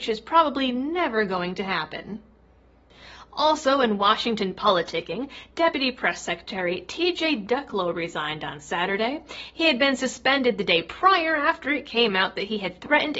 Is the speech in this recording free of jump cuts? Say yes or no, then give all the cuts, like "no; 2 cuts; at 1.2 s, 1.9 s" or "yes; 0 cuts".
yes; 0 cuts